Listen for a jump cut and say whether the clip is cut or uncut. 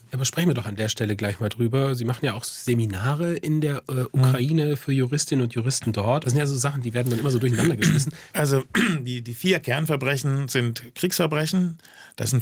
cut